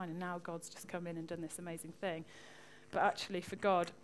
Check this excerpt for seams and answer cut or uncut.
uncut